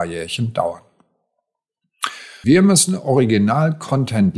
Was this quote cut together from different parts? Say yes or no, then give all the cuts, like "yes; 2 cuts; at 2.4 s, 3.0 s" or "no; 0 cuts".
yes; 1 cut; at 2.4 s